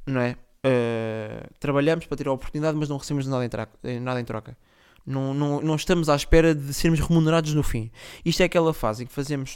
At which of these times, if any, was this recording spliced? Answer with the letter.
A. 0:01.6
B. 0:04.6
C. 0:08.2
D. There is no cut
D